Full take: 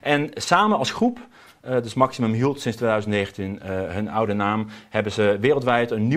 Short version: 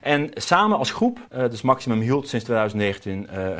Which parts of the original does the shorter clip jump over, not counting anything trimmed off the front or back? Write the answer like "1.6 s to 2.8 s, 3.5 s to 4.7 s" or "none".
1.3 s to 1.6 s

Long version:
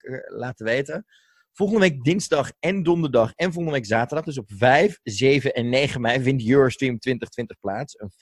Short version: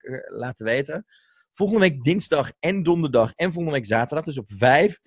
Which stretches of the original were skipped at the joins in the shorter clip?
none

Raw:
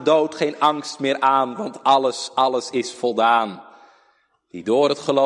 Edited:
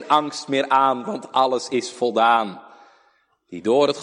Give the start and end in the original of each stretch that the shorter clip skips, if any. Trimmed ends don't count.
1.8 s to 2.3 s

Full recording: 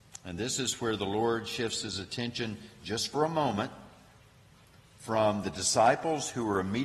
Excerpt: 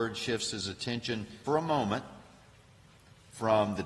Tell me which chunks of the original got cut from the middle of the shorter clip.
2.8 s to 3.1 s

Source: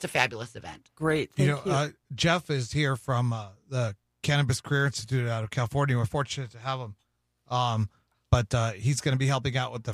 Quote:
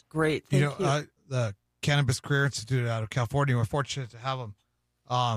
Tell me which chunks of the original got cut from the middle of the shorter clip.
2.0 s to 3.6 s

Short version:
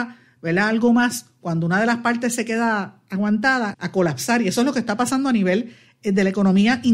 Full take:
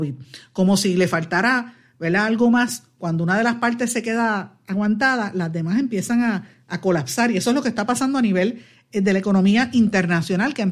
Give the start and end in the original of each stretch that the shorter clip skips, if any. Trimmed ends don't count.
5.3 s to 6.6 s

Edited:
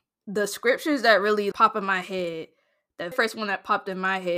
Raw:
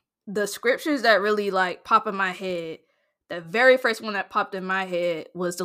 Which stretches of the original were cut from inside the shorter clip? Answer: 1.5 s to 1.8 s, 3.4 s to 3.8 s

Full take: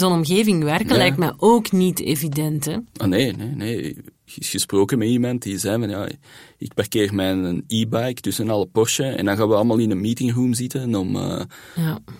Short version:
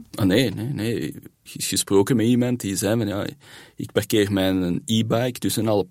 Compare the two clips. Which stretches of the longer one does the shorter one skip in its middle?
none

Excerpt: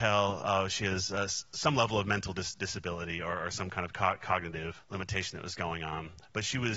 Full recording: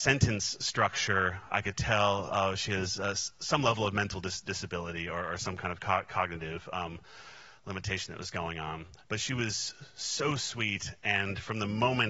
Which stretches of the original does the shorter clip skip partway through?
6.7 s to 7.5 s

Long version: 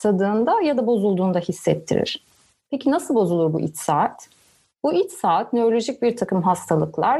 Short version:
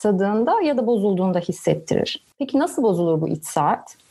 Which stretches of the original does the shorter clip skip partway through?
2.3 s to 2.6 s

